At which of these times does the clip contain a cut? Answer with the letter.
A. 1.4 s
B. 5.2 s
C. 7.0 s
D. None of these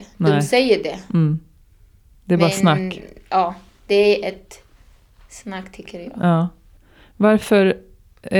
D